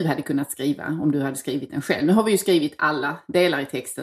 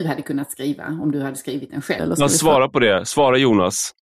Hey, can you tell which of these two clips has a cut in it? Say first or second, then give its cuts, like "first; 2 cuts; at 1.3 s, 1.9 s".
second; 1 cut; at 2.0 s